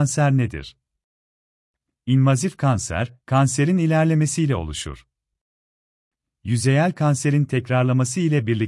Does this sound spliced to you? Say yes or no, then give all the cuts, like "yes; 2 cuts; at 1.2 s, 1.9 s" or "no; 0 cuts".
no; 0 cuts